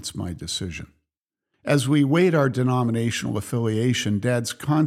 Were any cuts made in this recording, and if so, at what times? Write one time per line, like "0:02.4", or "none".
0:01.5